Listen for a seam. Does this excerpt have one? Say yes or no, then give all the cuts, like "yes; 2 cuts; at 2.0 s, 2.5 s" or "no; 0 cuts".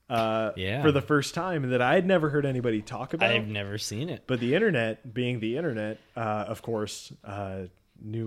no; 0 cuts